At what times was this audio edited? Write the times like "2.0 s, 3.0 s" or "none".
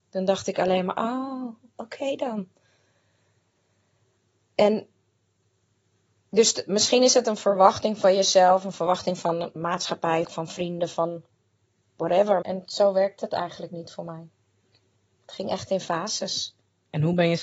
10.2 s, 12.4 s